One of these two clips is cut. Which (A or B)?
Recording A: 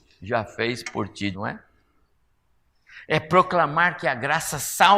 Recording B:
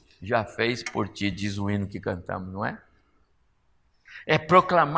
A